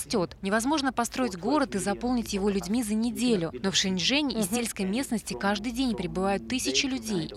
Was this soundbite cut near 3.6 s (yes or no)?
no